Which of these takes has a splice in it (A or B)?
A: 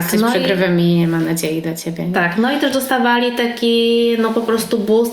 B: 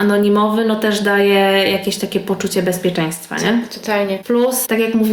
B